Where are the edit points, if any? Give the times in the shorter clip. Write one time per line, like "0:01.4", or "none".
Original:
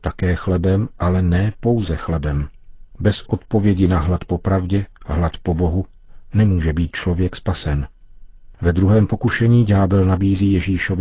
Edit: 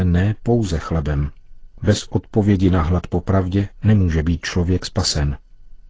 0:03.8